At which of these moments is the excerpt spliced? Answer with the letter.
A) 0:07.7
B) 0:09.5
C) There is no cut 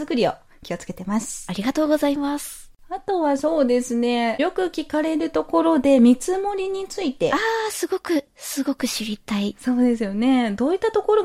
C